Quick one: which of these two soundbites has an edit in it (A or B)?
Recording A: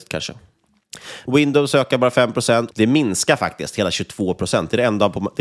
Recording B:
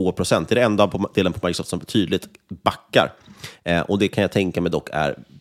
A